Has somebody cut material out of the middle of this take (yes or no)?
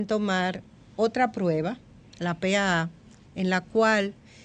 no